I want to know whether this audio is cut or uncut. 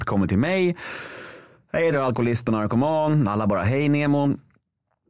cut